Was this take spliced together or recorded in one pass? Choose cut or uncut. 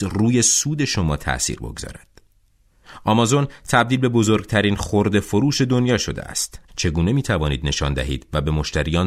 cut